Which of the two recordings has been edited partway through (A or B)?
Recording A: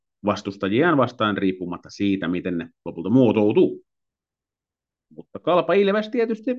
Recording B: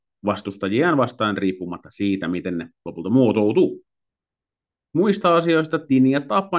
B